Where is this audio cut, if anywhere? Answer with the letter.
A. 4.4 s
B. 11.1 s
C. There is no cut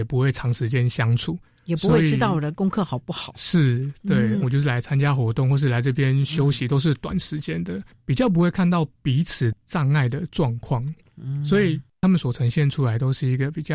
A